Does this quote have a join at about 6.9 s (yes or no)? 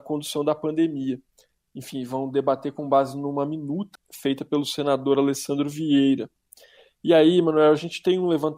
no